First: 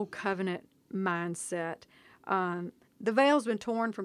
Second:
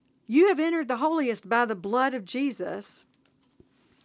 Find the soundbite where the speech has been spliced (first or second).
first